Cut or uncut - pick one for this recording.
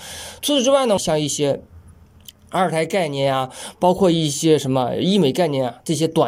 cut